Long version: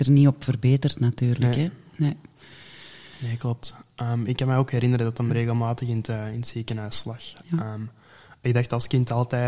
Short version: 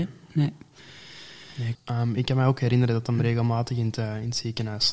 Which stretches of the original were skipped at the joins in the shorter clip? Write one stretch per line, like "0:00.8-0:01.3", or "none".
0:03.4-0:03.9